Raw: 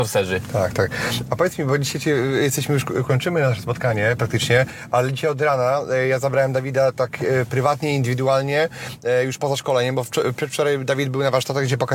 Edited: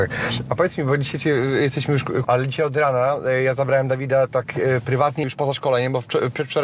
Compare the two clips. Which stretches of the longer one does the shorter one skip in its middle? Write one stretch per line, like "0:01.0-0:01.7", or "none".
0:03.1-0:04.9
0:07.9-0:09.3